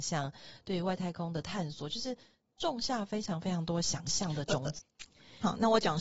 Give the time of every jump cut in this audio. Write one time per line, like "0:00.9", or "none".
0:04.8